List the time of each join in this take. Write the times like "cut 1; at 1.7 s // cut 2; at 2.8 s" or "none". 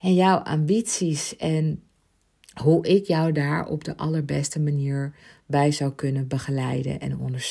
none